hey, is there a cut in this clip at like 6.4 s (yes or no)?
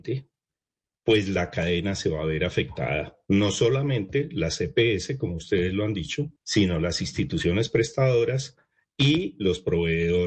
yes